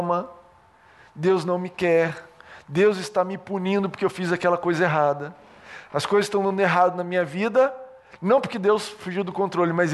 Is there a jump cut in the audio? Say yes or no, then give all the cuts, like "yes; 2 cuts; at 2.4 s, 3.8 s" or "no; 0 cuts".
no; 0 cuts